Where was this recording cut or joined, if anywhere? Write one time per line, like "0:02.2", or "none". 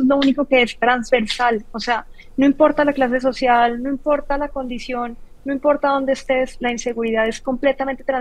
none